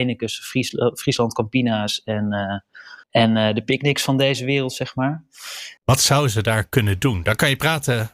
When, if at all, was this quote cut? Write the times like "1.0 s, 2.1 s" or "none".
3.0 s, 5.8 s